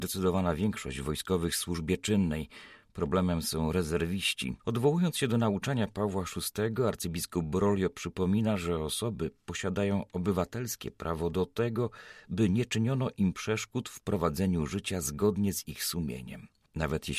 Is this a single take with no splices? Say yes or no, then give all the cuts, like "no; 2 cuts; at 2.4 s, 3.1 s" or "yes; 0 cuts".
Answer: no; 1 cut; at 4.6 s